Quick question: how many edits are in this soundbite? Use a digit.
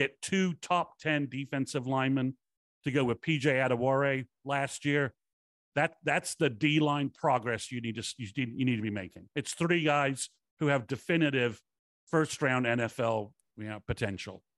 0